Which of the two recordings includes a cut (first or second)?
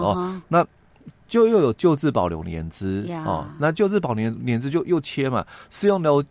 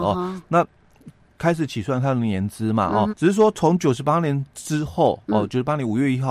second